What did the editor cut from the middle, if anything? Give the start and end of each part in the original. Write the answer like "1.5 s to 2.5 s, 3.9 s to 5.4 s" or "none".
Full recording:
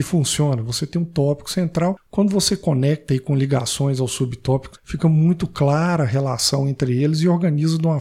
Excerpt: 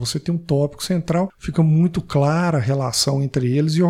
2.0 s to 4.8 s

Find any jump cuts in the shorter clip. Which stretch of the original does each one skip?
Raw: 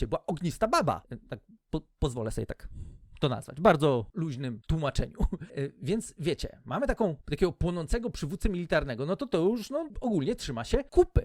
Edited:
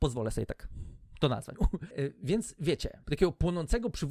3.5 s to 5.1 s, 6.6 s to 7.2 s

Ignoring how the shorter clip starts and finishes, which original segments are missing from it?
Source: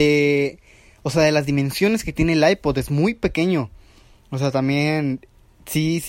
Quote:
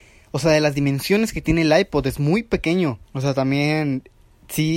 3.7 s to 4.2 s

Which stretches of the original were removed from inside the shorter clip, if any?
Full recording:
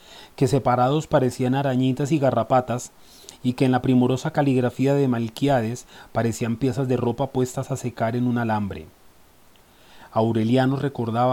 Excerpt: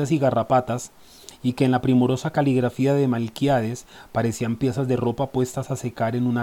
none

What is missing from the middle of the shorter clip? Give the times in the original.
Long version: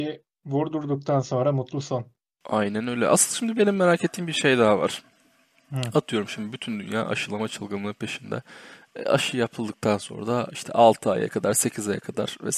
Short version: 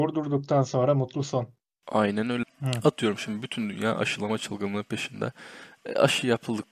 3.0 s to 5.5 s

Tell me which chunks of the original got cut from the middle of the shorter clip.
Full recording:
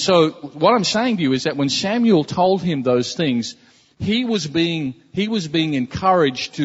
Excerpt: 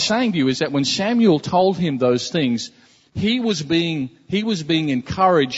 none

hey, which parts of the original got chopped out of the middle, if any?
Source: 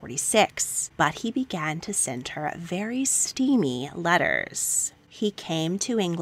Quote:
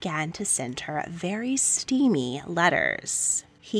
none

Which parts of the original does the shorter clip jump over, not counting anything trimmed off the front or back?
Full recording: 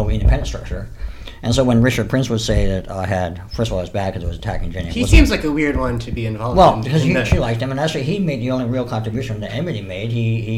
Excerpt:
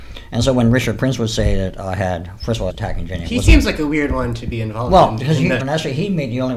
3.8 s to 4.3 s, 7.2 s to 7.7 s

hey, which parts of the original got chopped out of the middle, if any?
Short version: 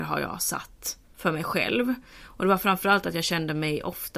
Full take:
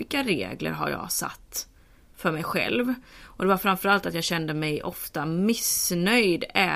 1.7 s to 2.0 s

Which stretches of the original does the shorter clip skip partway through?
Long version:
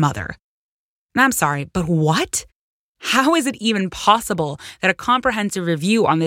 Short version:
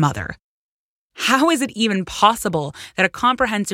1.0 s to 2.9 s

